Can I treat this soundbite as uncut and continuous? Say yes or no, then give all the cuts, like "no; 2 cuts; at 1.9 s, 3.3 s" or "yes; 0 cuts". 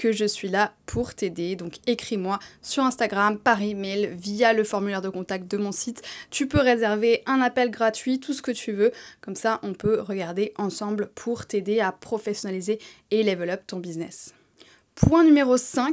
yes; 0 cuts